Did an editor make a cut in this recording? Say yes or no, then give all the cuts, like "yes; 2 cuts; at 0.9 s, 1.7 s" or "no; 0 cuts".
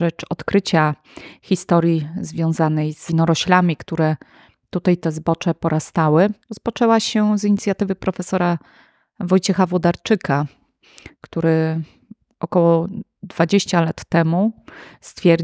yes; 1 cut; at 6.4 s